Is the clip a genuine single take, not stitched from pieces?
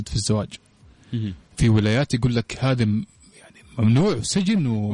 yes; 0 cuts

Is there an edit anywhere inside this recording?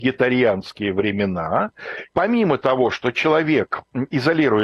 yes; 1 cut; at 2.1 s

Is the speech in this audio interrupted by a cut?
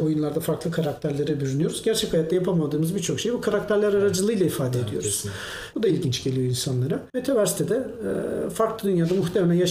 yes; 2 cuts; at 5.7 s, 7.1 s

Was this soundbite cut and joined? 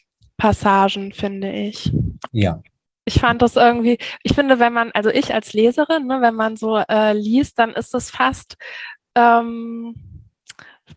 yes; 1 cut; at 2.3 s

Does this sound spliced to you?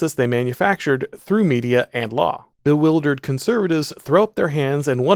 yes; 1 cut; at 2.5 s

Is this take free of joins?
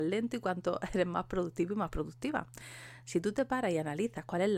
yes; 0 cuts

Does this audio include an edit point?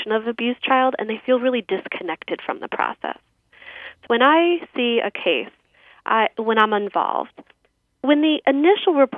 yes; 1 cut; at 4.1 s

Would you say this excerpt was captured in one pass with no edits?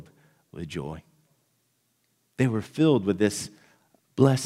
yes; 0 cuts

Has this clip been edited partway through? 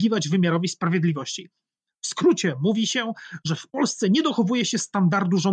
no; 0 cuts

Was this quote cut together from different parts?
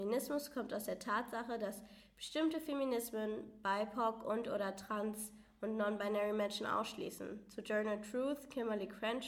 no; 0 cuts

